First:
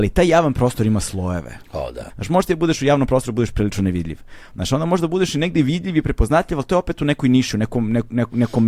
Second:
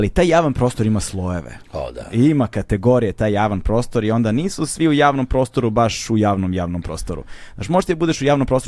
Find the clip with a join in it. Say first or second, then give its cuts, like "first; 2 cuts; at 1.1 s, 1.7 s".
first; 1 cut; at 2.1 s